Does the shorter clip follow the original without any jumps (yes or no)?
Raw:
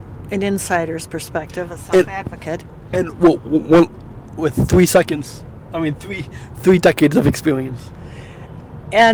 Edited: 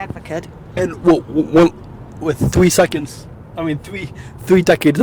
yes